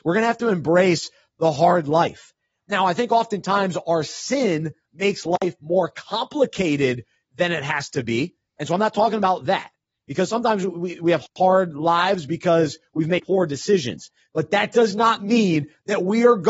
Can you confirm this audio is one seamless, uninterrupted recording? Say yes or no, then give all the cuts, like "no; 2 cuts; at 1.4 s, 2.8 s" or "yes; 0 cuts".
no; 1 cut; at 14.2 s